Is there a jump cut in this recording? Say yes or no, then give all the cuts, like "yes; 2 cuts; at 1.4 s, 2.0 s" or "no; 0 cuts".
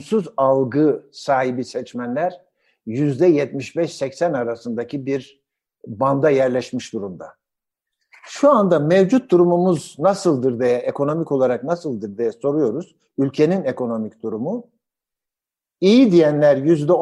no; 0 cuts